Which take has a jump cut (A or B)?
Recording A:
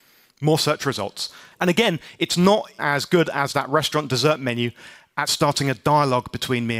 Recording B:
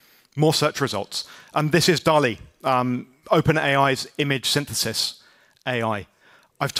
A